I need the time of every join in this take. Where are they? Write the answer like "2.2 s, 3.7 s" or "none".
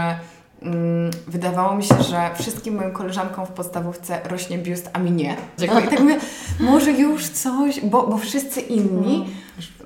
5.6 s